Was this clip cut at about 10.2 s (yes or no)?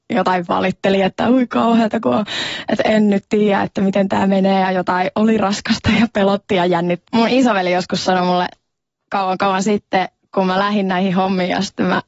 no